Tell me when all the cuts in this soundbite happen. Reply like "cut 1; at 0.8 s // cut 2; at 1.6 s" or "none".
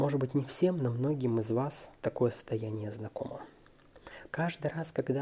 cut 1; at 2.0 s // cut 2; at 4.3 s